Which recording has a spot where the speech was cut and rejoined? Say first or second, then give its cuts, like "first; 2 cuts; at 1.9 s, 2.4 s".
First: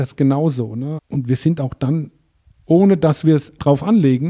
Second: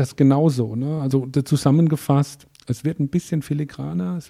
first; 1 cut; at 1.0 s